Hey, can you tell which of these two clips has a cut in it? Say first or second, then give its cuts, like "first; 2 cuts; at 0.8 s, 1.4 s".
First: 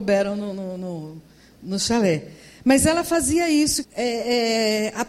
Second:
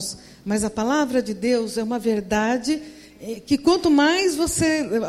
first; 1 cut; at 3.8 s